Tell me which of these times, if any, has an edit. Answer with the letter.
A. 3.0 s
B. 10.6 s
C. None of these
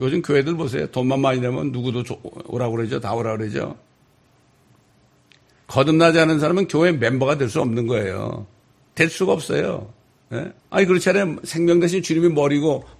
B